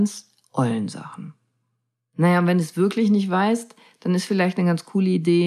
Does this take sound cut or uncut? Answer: uncut